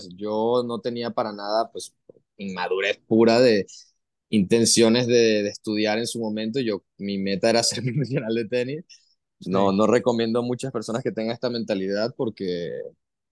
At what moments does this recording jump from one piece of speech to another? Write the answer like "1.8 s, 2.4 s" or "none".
none